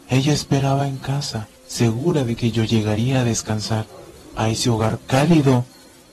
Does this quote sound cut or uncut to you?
cut